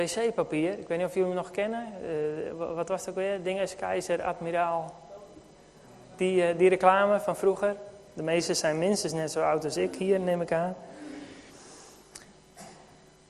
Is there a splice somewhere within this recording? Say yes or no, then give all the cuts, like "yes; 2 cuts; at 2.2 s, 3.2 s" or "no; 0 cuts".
no; 0 cuts